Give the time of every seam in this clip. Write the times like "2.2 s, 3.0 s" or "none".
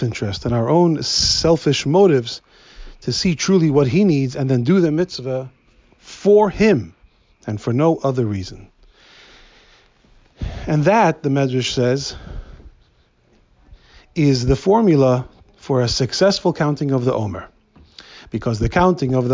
none